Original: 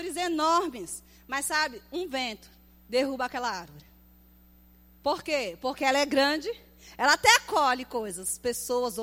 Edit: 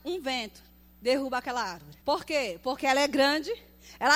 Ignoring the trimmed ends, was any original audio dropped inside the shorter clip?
yes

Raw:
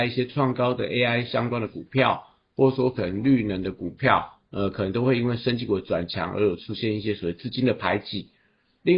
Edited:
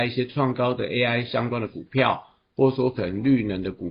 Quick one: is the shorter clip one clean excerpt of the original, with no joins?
yes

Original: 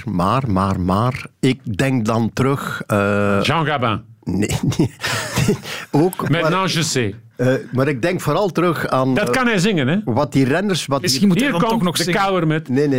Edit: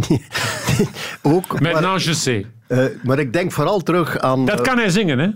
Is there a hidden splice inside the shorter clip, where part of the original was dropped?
no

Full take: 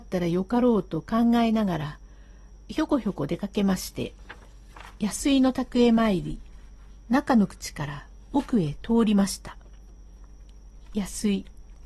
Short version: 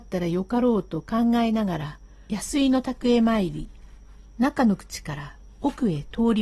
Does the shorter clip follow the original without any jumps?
no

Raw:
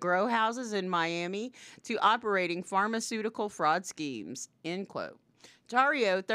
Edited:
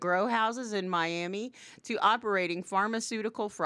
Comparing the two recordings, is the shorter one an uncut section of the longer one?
yes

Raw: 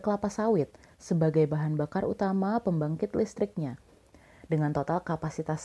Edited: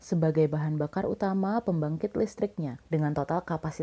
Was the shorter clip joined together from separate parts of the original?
yes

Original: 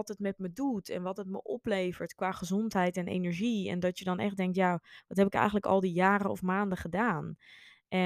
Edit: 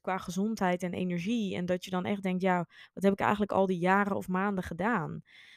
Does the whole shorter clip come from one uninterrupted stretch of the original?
yes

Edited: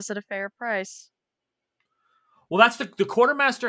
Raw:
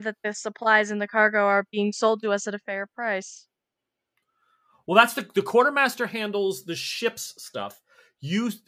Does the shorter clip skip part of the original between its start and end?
no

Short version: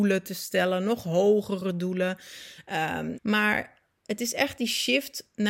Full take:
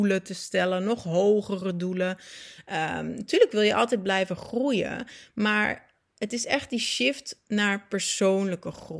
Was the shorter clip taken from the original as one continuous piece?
no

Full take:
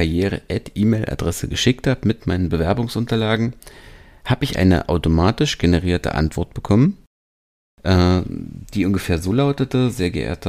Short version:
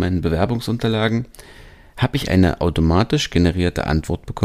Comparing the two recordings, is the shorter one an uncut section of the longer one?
yes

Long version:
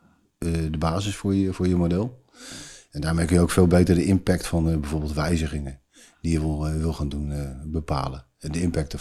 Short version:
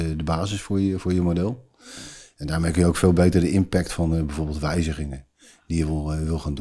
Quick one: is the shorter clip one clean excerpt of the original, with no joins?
yes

